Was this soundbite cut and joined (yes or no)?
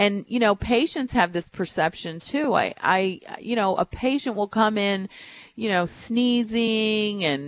no